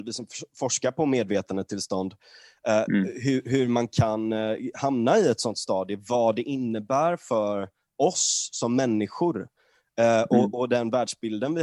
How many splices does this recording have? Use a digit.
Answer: 0